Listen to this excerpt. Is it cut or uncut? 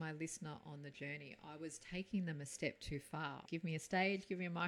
cut